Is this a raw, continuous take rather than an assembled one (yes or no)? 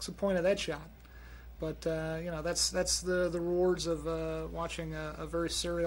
yes